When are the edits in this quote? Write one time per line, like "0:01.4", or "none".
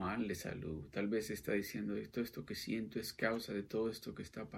none